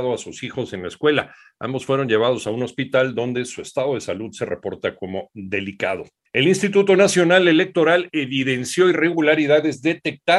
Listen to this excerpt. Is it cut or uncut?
uncut